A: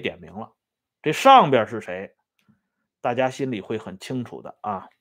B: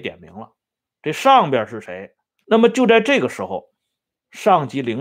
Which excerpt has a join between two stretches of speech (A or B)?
B